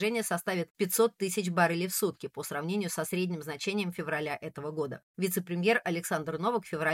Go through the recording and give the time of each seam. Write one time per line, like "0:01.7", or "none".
0:05.1